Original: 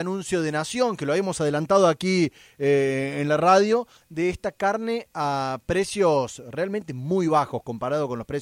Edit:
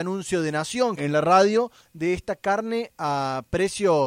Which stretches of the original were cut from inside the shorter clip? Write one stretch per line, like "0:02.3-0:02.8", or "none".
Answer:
0:01.0-0:03.1